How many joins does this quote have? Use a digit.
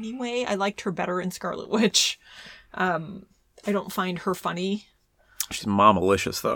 0